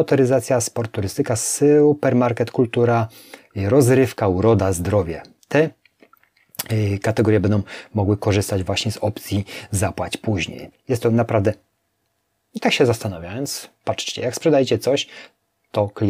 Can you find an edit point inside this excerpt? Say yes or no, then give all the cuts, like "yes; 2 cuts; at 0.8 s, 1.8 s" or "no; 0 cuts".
yes; 1 cut; at 10.7 s